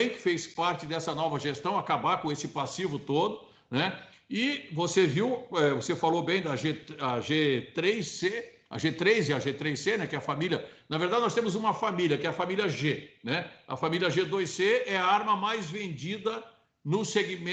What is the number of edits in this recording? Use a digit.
0